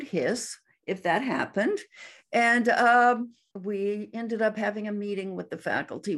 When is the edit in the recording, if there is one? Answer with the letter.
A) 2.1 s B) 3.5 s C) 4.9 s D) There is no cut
B